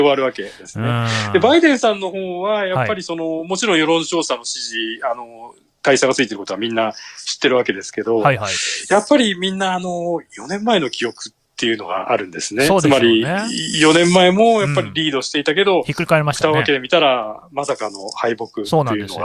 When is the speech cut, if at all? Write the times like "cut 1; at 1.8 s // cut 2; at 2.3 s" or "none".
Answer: none